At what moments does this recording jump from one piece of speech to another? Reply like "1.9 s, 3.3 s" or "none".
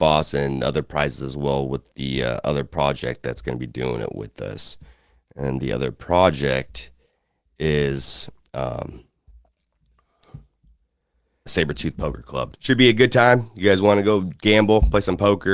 11.5 s, 12.5 s